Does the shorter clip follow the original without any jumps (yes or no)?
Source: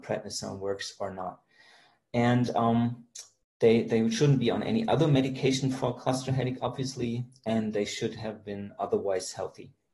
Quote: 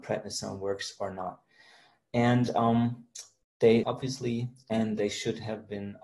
no